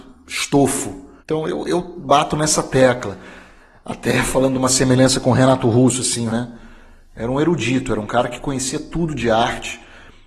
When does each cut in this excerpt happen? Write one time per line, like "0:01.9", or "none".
0:01.2
0:06.3

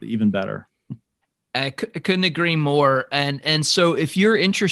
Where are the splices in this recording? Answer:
none

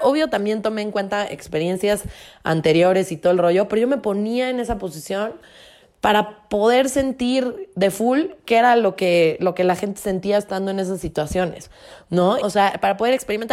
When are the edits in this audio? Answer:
0:12.4

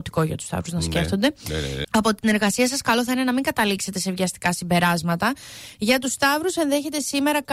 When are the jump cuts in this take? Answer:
0:01.8
0:05.7

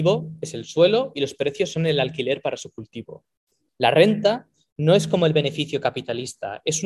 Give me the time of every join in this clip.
0:03.7

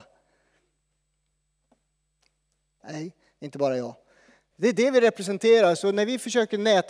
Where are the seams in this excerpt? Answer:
0:02.8
0:04.5

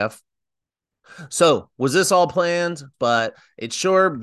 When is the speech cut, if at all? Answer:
0:02.9

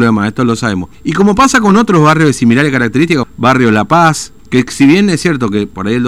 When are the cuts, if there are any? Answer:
0:00.9
0:03.2
0:04.4

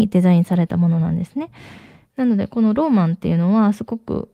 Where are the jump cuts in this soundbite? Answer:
0:02.0

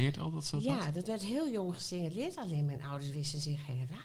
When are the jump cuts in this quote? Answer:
none

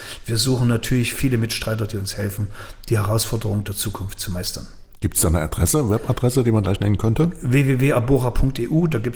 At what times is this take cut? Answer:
none

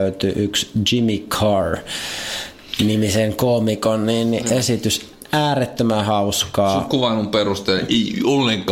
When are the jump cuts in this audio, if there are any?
none

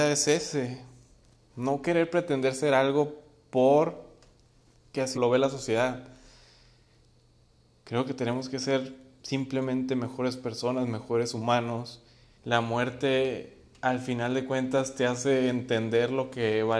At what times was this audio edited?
0:05.1
0:12.3

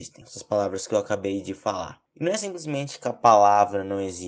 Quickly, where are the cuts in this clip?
none

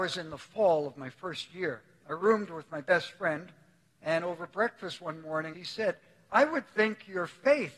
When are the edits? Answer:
0:05.5

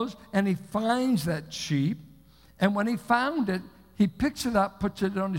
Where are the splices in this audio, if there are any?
none

